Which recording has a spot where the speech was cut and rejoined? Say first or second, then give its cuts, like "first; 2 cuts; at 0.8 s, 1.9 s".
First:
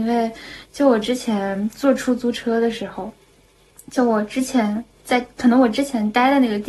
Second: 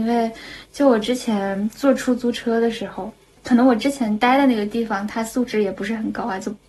second; 1 cut; at 3.4 s